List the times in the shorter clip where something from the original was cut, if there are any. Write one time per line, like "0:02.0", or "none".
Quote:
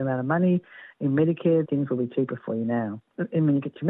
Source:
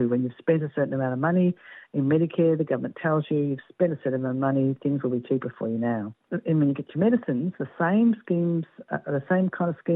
0:01.6